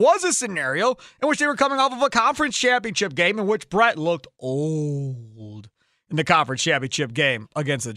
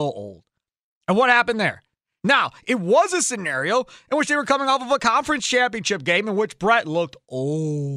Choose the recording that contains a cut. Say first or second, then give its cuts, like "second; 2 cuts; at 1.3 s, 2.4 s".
second; 1 cut; at 2.2 s